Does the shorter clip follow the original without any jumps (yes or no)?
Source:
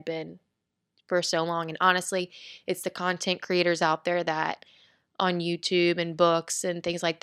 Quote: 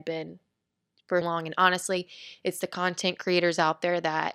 no